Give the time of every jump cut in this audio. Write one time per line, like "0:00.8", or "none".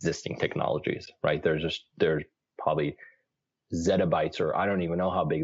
none